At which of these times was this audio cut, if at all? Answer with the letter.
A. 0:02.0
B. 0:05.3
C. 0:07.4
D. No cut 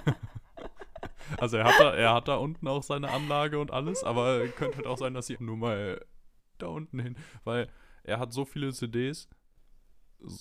B